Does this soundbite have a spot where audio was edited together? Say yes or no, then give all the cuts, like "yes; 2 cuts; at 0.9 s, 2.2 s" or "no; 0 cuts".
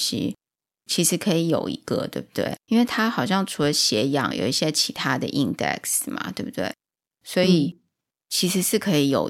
yes; 2 cuts; at 2.6 s, 4.3 s